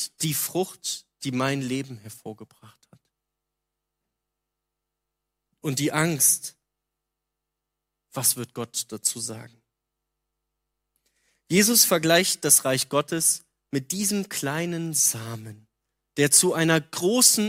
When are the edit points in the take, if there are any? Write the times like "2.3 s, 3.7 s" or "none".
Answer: none

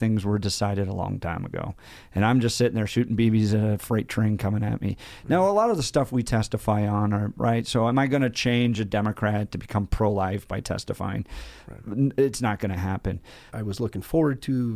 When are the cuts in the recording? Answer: 7.4 s, 13.5 s

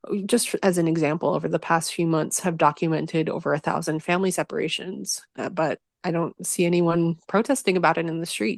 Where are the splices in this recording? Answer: none

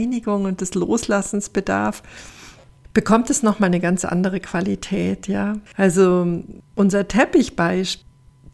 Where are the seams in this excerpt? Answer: 5.7 s

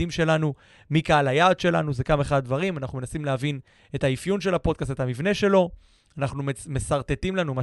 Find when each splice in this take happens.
none

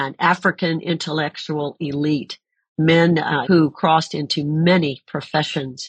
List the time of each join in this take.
3.4 s

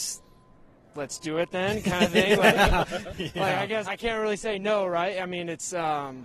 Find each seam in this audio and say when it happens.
3.8 s

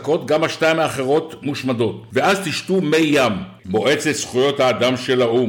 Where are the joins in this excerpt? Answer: 3.6 s

